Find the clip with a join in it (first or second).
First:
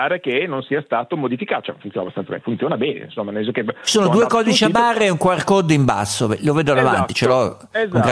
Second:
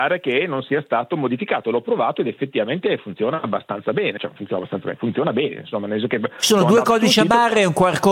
first